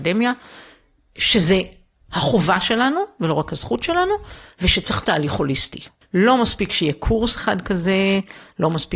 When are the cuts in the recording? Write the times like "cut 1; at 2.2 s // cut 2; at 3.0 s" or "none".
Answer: cut 1; at 6.0 s